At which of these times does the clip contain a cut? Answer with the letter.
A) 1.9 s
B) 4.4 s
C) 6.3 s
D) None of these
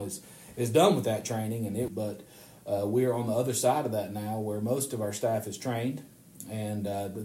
A